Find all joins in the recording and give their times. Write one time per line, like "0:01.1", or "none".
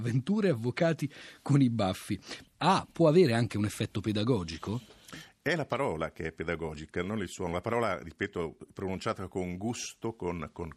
0:02.4

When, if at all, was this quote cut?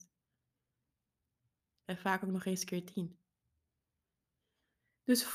0:01.8

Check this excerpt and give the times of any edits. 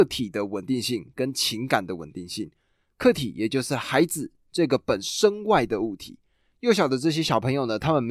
0:05.0

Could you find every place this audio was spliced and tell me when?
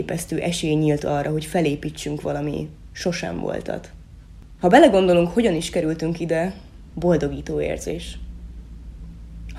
0:04.6
0:06.9

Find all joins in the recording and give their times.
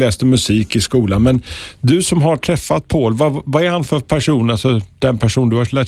none

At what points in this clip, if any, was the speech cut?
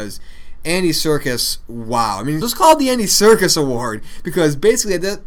0:02.4

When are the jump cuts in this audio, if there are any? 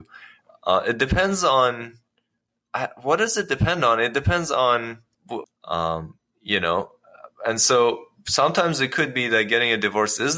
0:05.4

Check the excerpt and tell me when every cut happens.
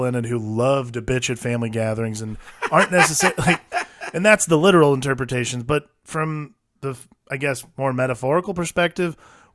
none

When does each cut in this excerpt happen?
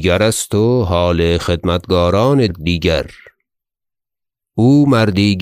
0:02.5

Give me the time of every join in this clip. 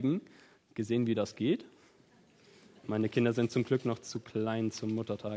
0:02.8

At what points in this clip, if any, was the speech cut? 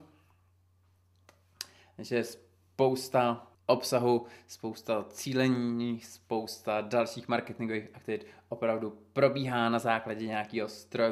0:03.5

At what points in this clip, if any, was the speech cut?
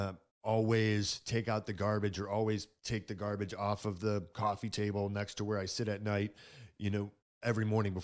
none

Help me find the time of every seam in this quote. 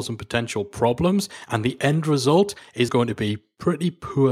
0:02.9

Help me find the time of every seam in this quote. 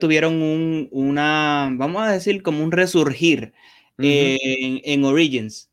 none

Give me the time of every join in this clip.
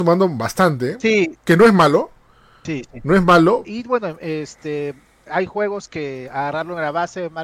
0:03.6

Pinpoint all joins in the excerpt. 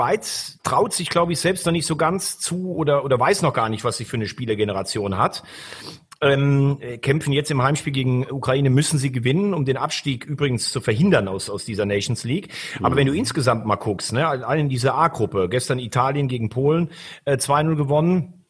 none

